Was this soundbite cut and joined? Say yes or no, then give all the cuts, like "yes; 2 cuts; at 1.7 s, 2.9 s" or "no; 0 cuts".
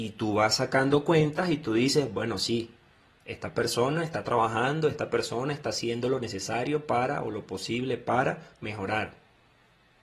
no; 0 cuts